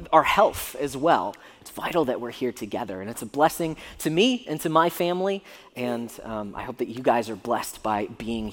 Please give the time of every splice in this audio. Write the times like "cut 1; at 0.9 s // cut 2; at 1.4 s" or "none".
cut 1; at 1.6 s